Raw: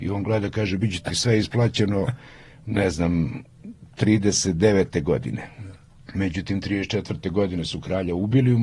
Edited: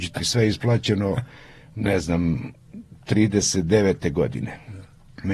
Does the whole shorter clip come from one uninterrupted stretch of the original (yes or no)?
yes